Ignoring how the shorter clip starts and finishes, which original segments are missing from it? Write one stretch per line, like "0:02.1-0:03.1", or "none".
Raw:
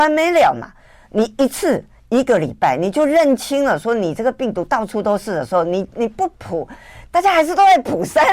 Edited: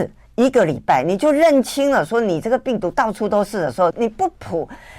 0:05.6-0:05.9